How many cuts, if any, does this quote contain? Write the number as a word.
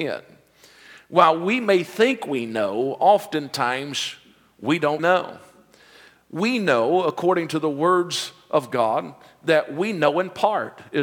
one